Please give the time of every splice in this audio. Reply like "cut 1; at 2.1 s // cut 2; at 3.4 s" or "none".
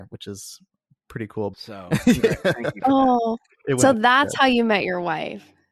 cut 1; at 1.5 s